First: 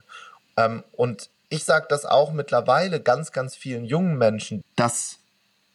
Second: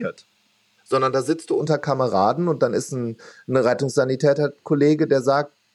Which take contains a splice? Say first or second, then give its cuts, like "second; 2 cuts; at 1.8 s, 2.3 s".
first; 1 cut; at 4.6 s